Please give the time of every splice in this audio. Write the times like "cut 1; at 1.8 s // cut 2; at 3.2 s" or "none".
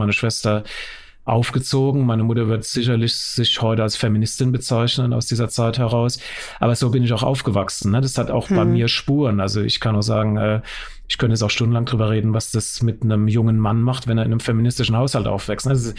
none